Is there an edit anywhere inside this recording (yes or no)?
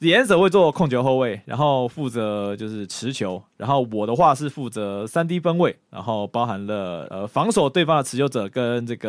no